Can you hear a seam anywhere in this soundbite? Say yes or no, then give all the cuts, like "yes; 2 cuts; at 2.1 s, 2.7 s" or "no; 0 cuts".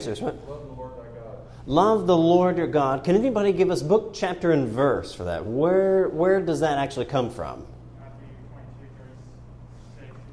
no; 0 cuts